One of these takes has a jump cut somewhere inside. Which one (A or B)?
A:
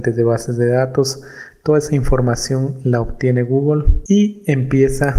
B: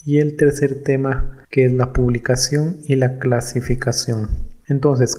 B